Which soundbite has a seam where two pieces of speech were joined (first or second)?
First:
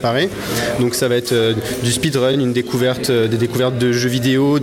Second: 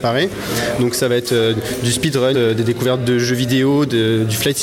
second